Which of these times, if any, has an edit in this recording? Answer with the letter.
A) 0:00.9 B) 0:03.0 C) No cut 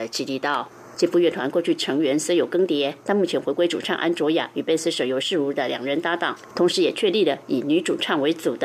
A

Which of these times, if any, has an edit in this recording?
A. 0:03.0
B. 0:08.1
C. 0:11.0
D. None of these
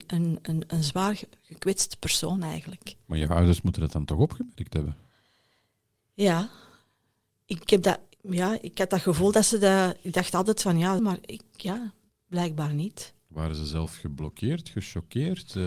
C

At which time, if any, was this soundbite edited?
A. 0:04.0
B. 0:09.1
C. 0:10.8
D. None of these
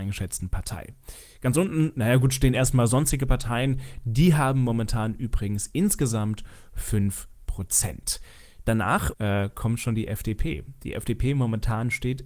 B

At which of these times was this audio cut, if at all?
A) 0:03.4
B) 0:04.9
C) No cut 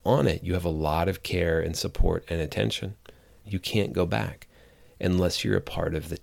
A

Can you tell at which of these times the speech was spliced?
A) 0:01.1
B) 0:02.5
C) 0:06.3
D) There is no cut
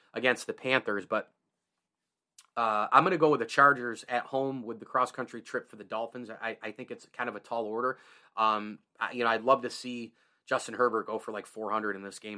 D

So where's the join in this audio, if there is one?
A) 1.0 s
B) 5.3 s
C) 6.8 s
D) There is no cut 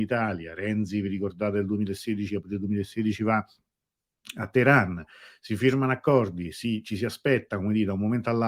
D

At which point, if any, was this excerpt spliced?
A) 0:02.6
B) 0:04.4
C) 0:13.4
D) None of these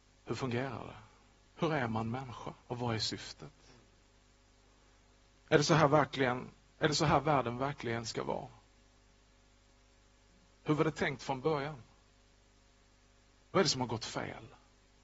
A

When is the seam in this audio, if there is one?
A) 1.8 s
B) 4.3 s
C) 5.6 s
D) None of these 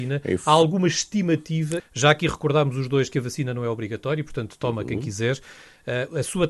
A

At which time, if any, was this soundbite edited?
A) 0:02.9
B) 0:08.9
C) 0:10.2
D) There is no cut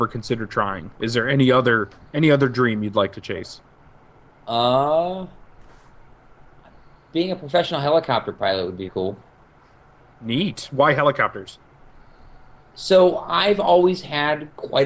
B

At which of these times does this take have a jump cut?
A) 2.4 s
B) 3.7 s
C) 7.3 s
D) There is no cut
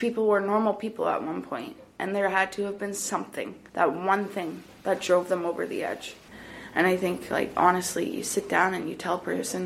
B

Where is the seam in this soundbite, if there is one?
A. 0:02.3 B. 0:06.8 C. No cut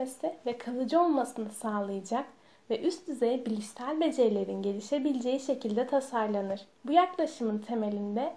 B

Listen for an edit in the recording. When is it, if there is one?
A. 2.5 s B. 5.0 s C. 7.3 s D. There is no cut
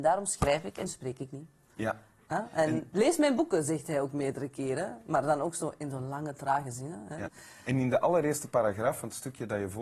C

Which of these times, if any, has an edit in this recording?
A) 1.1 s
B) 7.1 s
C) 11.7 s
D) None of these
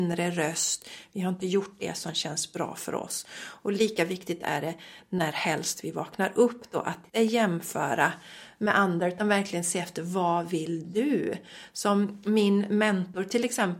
B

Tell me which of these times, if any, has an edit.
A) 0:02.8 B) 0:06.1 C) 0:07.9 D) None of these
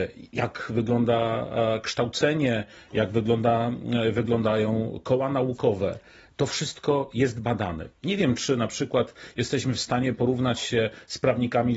D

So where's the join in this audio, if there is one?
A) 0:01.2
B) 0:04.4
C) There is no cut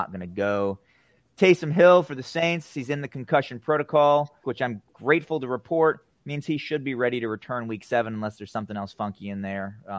B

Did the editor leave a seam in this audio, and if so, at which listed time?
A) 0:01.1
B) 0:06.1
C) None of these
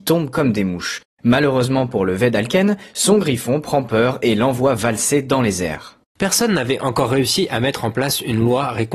B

